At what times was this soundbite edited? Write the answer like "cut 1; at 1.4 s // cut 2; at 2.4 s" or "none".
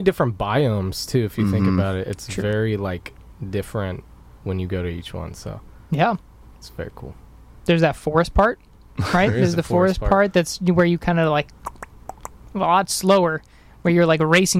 none